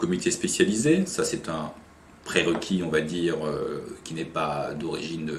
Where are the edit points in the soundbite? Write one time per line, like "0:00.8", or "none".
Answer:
none